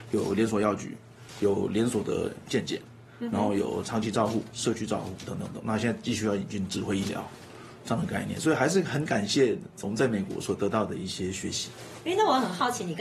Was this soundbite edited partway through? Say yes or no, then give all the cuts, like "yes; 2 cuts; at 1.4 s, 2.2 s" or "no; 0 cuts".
no; 0 cuts